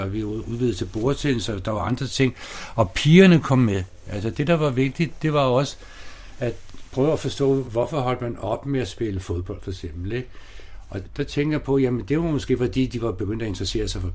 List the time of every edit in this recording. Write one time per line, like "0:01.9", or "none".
none